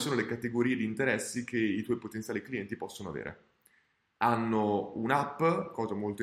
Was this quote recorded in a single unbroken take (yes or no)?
no